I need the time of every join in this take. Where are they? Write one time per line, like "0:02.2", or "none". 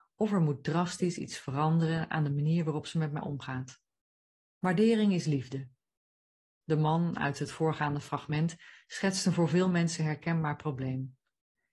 0:04.4

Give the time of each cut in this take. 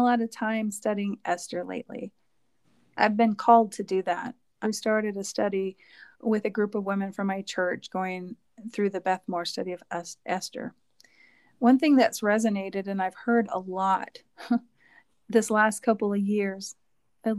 0:04.6
0:06.1

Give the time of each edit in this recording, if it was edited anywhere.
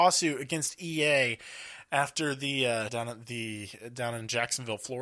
0:02.9

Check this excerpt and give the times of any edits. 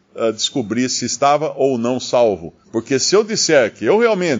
0:02.6

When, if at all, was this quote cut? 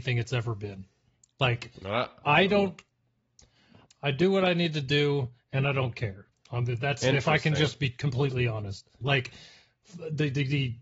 0:03.9
0:06.3
0:09.0

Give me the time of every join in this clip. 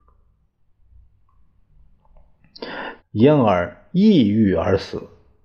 0:03.0

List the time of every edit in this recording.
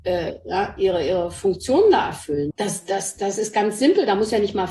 0:02.5

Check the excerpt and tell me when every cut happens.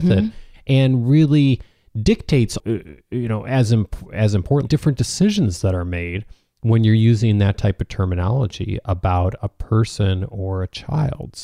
0:02.6
0:04.7

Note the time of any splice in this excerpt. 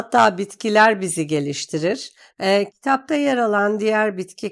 0:02.3

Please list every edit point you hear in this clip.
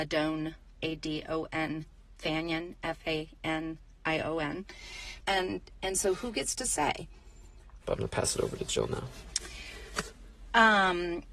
0:05.2
0:07.8

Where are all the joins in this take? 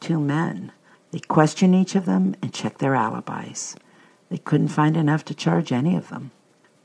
0:00.9

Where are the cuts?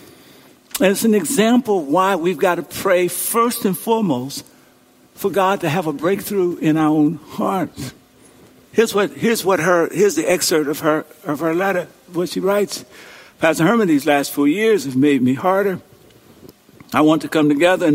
none

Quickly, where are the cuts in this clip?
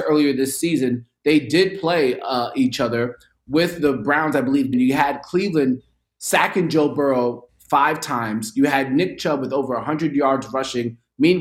0:04.7

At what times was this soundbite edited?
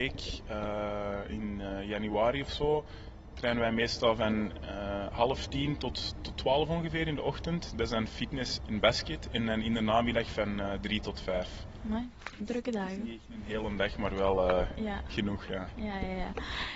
0:08.6

